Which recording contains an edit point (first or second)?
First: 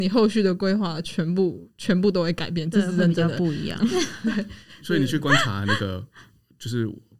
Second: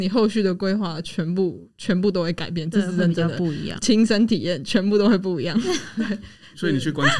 first